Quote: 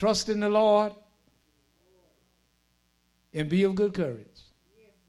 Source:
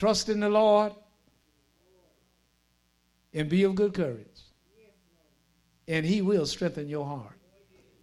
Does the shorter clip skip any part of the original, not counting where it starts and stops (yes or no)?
no